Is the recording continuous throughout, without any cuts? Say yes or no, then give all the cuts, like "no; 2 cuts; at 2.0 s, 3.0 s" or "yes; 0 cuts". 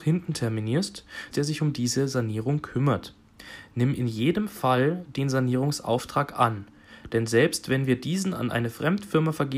no; 1 cut; at 1.3 s